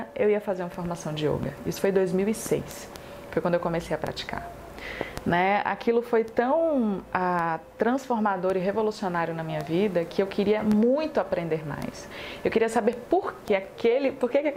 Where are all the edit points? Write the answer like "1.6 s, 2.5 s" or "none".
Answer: 13.5 s